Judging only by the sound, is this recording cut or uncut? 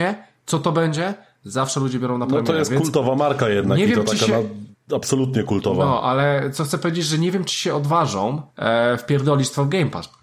cut